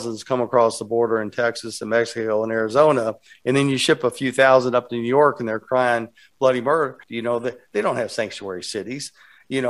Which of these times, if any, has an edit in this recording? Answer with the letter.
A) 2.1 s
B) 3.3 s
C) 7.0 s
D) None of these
C